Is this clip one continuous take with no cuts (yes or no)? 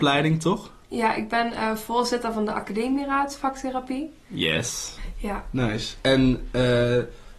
no